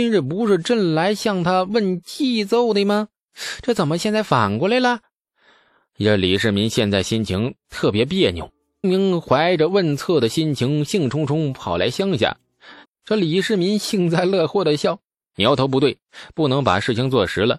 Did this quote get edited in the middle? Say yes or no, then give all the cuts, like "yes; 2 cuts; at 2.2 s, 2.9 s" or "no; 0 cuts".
yes; 2 cuts; at 8.8 s, 12.8 s